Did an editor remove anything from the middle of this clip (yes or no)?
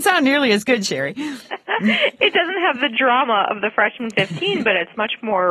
no